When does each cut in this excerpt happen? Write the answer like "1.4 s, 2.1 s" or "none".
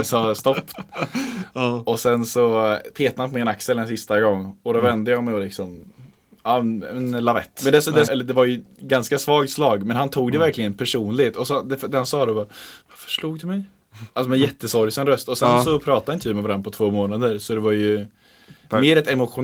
8.1 s